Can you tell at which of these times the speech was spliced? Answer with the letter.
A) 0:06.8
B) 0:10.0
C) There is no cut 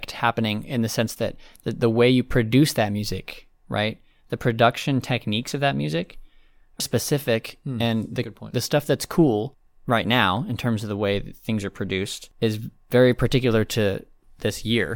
A